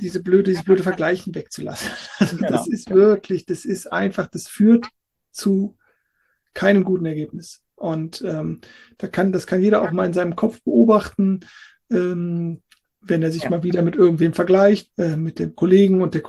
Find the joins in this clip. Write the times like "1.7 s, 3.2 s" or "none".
14.9 s